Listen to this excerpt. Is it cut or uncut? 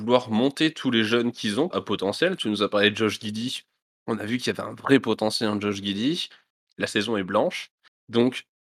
cut